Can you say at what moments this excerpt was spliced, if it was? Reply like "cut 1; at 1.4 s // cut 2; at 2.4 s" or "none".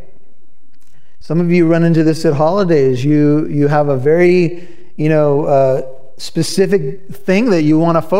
cut 1; at 1.2 s